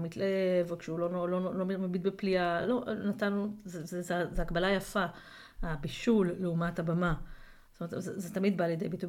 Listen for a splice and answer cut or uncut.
uncut